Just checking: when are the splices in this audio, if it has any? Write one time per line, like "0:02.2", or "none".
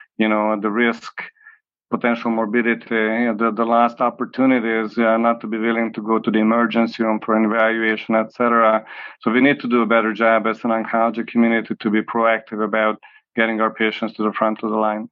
0:02.8